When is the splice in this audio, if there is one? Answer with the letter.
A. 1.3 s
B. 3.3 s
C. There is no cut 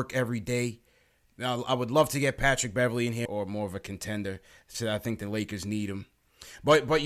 B